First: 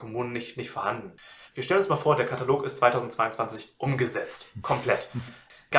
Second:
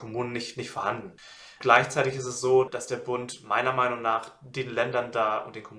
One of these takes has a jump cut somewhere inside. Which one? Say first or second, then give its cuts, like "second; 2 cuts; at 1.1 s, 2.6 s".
first; 1 cut; at 1.5 s